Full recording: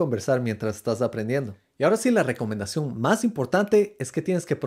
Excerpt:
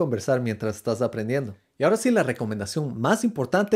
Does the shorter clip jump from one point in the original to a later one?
no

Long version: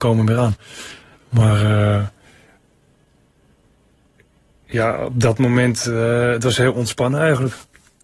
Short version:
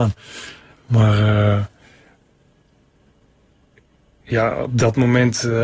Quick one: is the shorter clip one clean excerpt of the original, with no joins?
yes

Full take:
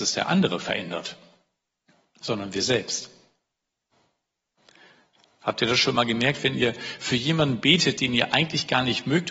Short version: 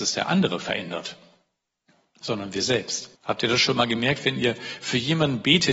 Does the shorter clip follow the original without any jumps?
no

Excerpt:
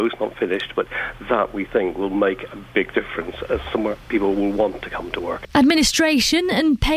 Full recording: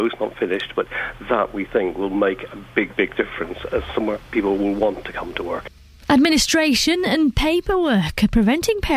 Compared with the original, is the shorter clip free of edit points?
no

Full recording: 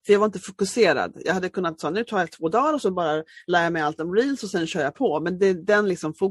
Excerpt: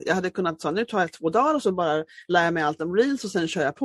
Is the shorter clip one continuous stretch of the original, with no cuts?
yes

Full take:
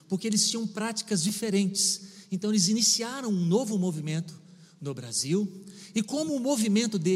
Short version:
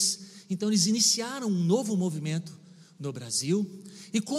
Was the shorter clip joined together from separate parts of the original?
no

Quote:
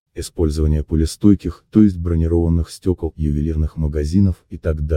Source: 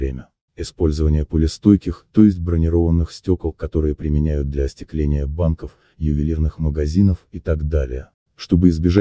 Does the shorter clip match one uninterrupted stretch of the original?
no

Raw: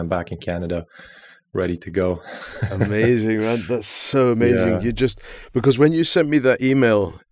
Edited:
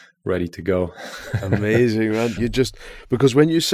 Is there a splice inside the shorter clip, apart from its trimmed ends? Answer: yes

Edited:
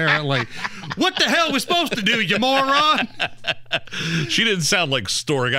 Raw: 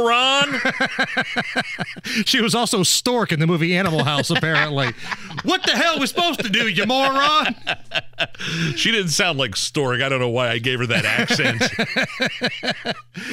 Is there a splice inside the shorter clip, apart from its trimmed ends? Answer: no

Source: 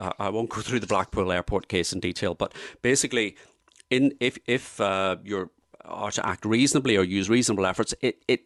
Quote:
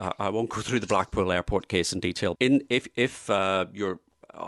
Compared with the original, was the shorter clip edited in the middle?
yes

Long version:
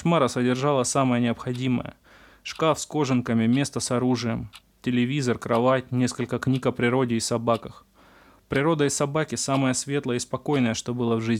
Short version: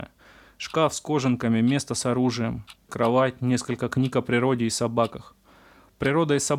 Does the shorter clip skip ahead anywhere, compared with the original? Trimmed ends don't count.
yes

